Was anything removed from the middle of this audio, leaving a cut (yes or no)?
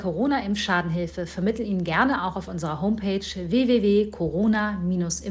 no